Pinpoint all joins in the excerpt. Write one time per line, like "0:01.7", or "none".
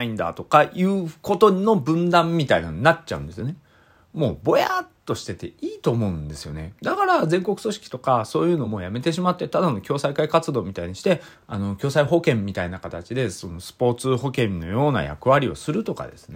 0:06.8
0:08.7
0:11.3